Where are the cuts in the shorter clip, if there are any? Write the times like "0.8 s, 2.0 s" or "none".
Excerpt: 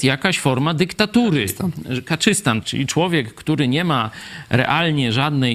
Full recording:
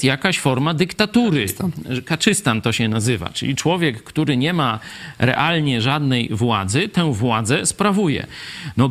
2.6 s